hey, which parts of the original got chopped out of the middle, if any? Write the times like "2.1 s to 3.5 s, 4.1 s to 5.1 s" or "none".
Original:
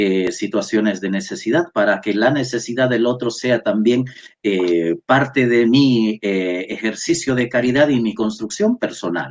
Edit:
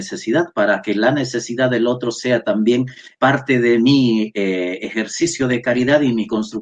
4.4 s to 5.0 s